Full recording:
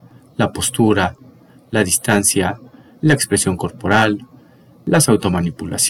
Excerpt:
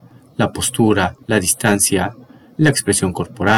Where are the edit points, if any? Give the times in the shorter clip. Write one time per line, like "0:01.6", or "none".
0:01.2